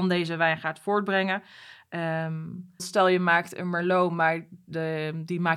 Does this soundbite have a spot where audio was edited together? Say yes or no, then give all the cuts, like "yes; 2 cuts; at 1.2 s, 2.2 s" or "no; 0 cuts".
yes; 1 cut; at 2.8 s